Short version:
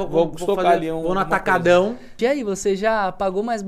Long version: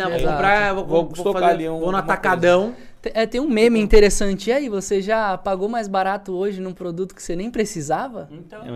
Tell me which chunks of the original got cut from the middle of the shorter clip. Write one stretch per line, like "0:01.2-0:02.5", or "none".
0:03.0-0:04.4